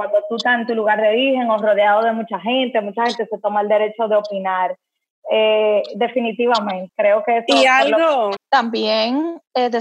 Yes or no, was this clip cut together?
yes